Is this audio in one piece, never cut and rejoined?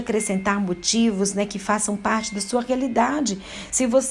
yes; 0 cuts

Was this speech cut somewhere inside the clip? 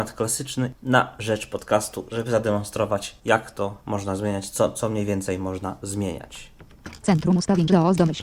no; 0 cuts

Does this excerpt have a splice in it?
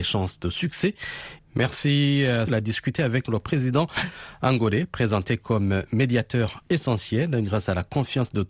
yes; 2 cuts; at 1.4 s, 2.5 s

